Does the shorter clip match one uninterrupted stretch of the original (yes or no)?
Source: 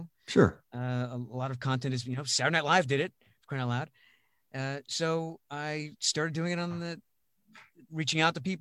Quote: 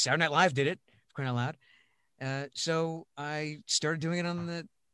yes